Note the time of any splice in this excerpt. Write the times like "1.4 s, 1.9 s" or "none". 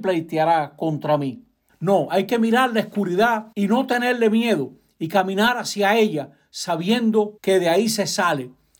1.7 s, 3.5 s, 7.4 s